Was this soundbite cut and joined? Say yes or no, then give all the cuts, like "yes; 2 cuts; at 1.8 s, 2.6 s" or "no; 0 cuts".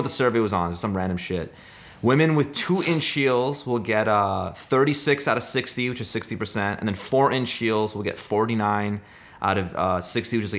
no; 0 cuts